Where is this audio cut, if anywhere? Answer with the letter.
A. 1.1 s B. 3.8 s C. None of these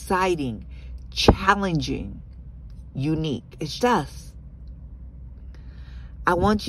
B